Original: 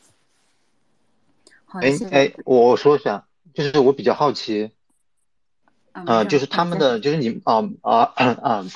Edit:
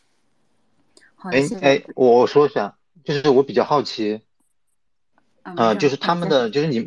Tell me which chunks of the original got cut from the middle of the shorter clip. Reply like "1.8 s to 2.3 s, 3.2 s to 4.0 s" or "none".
none